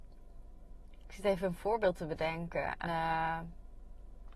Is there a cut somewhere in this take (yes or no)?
yes